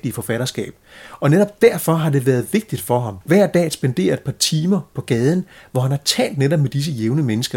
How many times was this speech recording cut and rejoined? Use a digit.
1